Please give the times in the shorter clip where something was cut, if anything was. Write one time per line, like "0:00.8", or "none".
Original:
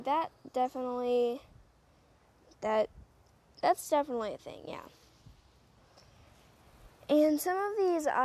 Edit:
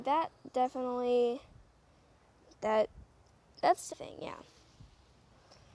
0:03.9